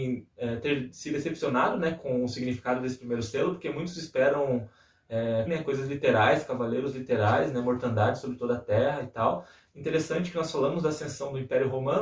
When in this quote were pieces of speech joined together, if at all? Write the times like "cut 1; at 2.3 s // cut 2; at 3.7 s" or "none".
cut 1; at 5.5 s // cut 2; at 9.7 s